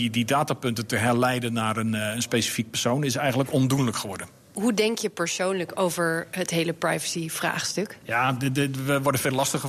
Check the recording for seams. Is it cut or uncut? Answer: uncut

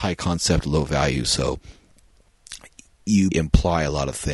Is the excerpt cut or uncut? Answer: cut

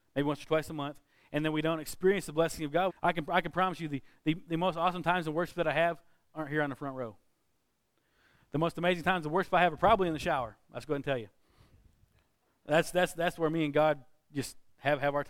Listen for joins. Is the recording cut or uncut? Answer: cut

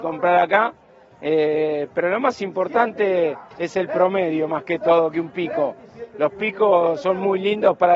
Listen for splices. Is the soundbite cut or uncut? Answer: uncut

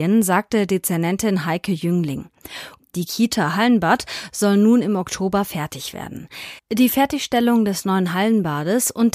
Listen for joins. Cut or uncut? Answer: cut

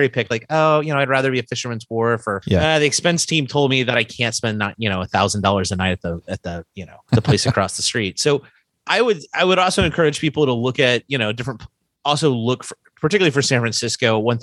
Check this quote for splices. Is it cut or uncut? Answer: uncut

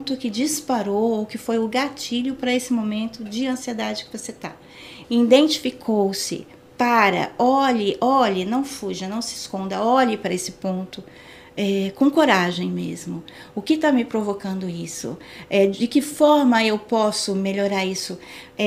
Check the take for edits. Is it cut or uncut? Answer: cut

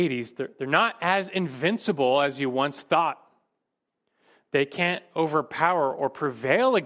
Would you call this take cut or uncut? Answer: uncut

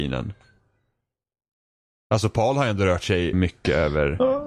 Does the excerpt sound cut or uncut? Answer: cut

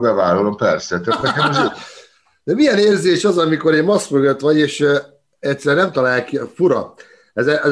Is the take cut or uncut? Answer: uncut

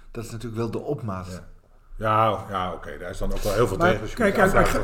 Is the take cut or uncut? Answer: cut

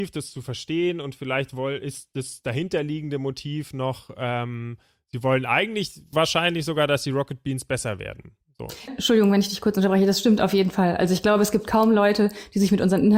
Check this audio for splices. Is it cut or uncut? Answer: cut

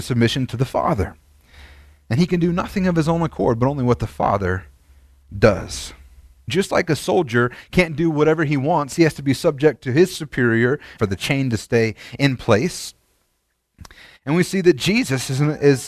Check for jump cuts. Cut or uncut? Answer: cut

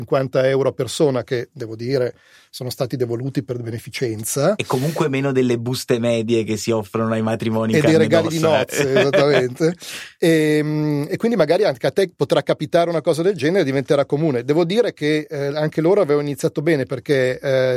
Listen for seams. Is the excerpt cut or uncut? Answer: uncut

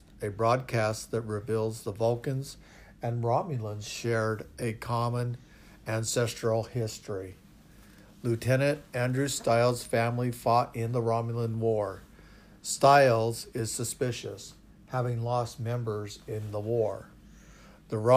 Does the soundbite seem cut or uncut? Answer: uncut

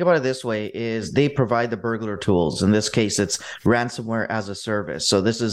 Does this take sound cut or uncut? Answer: uncut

